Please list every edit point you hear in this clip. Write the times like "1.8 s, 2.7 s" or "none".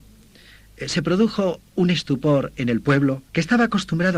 3.3 s